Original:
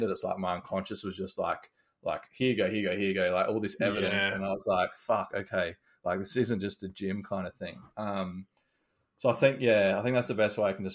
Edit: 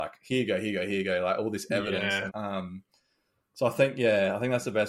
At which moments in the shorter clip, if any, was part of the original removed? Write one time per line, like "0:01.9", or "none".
0:02.3